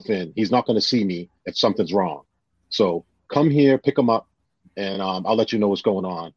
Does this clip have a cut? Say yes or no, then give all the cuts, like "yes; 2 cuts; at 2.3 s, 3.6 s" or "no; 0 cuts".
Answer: no; 0 cuts